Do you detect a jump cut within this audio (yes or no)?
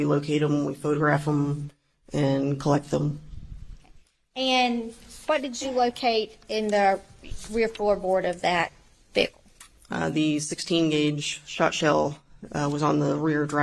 no